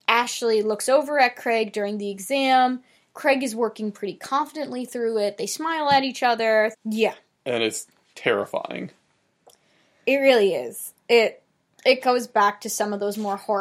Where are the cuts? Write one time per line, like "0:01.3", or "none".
0:06.7